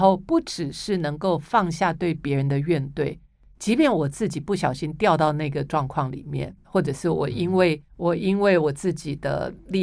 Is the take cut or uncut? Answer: cut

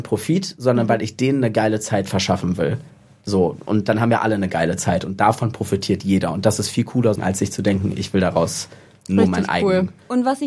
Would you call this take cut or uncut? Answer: cut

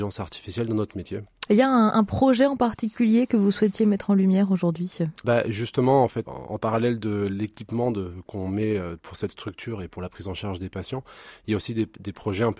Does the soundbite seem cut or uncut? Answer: cut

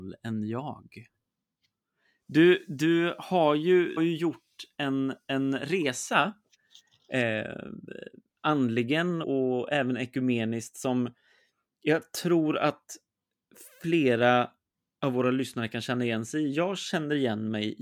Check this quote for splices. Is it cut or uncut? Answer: cut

